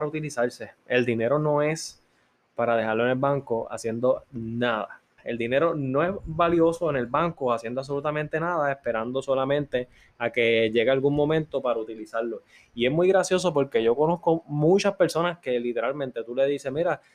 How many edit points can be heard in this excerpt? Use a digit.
1